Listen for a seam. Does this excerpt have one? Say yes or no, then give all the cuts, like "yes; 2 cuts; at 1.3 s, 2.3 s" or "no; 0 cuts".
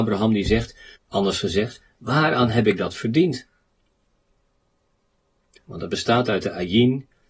yes; 2 cuts; at 0.9 s, 5.6 s